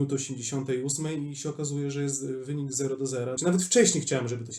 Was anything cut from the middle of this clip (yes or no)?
yes